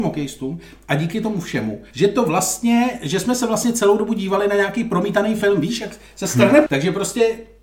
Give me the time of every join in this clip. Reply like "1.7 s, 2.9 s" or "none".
1.9 s, 6.7 s